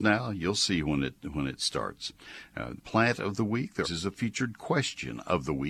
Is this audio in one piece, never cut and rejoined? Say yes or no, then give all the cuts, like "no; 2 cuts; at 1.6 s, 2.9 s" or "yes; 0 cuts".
no; 2 cuts; at 2.8 s, 3.8 s